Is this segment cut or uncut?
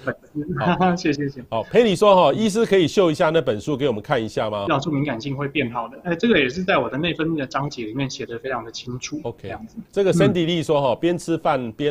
cut